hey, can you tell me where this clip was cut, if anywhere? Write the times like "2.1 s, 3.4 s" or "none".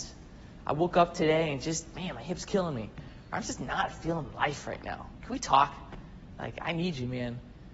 none

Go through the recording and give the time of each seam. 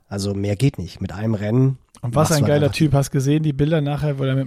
none

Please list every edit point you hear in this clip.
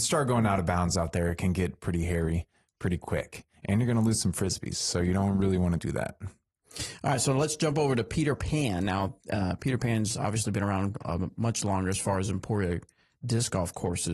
none

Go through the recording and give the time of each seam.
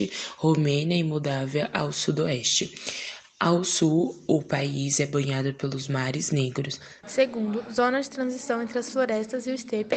7.0 s

